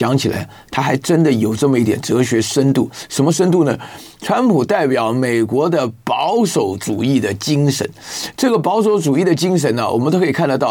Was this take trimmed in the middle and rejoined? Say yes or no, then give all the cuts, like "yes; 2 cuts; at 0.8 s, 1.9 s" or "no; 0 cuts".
no; 0 cuts